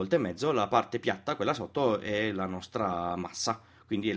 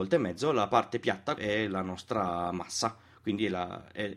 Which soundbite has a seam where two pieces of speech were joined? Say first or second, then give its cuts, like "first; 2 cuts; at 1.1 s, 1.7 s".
second; 1 cut; at 1.4 s